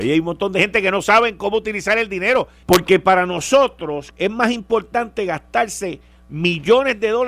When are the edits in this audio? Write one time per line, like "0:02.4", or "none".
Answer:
0:02.6
0:04.1

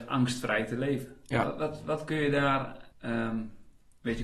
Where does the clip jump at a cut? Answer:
0:01.4
0:02.9

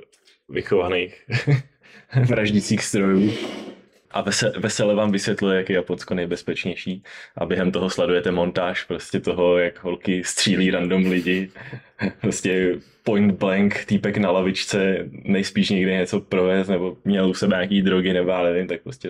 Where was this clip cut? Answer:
0:04.1

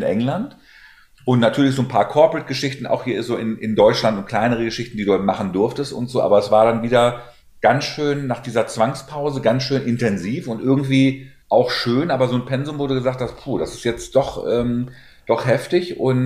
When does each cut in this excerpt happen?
0:11.4

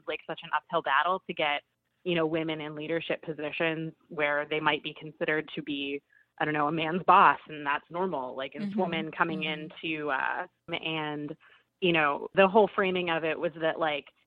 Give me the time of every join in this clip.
0:08.7
0:10.7
0:12.3

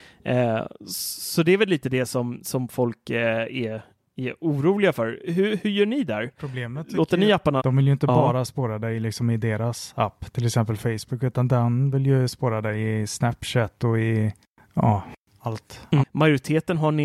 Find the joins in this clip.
0:07.6
0:16.0

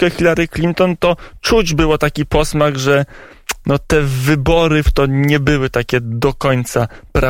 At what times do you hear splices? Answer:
0:04.8

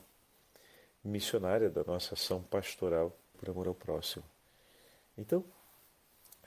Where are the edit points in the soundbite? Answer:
0:03.3

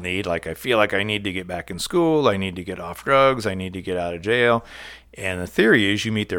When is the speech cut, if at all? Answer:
none

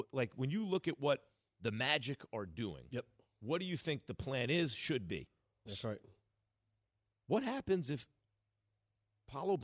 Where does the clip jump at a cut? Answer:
0:05.7

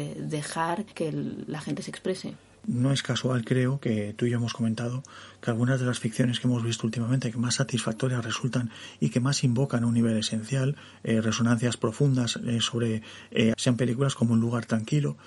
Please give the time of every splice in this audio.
0:13.5

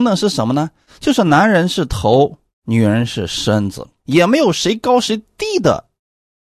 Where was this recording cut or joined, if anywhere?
0:04.0

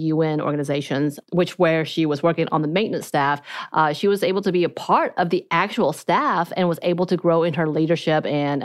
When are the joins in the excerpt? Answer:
none

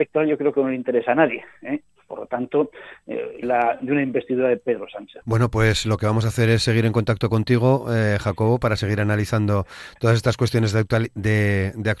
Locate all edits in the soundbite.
0:03.4
0:05.2

